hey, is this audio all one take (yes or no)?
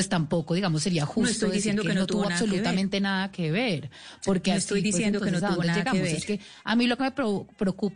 yes